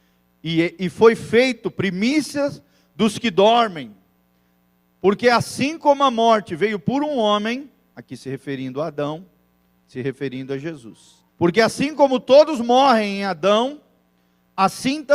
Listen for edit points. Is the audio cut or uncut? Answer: cut